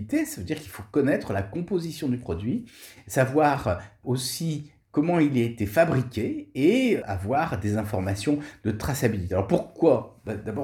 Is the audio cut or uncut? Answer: uncut